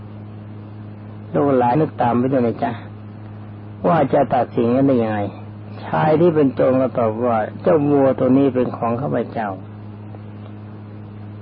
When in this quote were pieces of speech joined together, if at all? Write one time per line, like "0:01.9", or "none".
0:01.8